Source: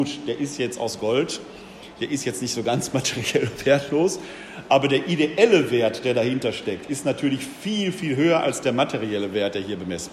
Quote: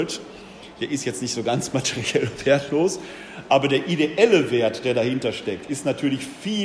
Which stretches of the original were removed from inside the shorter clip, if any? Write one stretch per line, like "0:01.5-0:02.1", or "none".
none